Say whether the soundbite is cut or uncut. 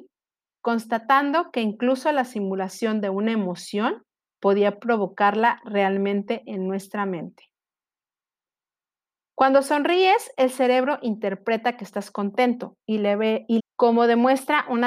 cut